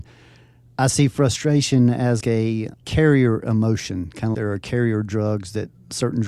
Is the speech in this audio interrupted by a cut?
yes; 2 cuts; at 2.2 s, 4.3 s

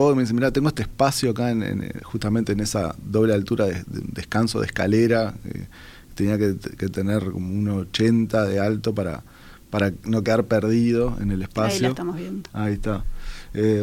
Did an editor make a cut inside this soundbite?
no; 0 cuts

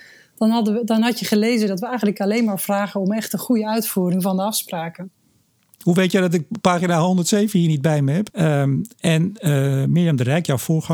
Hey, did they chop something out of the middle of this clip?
yes; 1 cut; at 8.3 s

